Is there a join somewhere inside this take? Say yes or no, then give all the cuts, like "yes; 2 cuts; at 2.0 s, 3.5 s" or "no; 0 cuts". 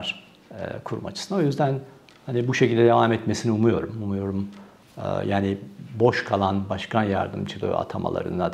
no; 0 cuts